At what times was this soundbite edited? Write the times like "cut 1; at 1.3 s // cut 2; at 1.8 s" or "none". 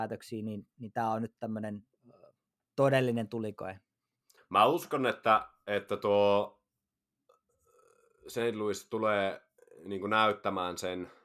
cut 1; at 4.4 s